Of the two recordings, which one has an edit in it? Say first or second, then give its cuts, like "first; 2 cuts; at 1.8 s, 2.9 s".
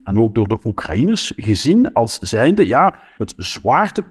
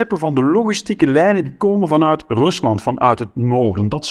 first; 1 cut; at 3.2 s